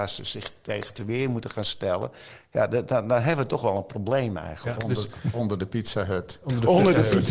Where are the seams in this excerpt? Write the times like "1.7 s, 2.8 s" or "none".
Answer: none